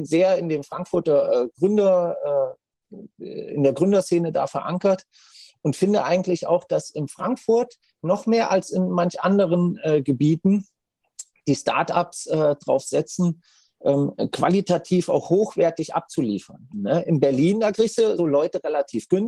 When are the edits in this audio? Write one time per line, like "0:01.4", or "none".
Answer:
0:16.7
0:18.2